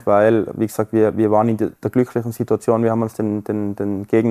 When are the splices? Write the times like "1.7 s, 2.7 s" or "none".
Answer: none